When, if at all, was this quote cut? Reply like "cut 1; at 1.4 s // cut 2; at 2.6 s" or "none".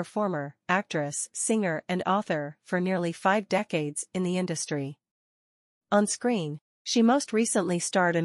none